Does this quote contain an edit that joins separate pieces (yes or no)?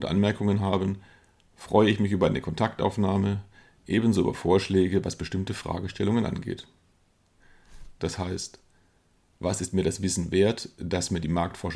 yes